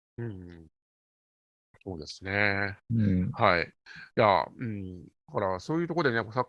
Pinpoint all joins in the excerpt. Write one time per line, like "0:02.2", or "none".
0:05.1